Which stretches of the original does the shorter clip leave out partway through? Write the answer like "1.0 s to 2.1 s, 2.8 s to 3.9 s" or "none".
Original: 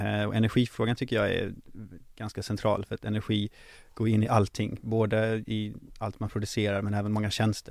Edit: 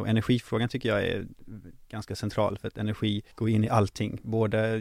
3.6 s to 3.9 s